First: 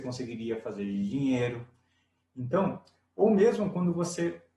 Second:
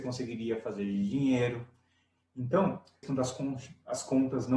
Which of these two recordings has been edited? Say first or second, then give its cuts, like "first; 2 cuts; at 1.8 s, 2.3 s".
second; 1 cut; at 3.0 s